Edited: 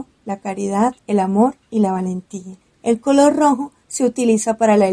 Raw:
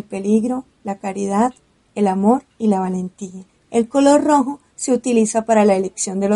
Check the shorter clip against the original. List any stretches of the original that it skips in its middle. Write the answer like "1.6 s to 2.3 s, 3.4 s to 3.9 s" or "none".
1.6 s to 1.9 s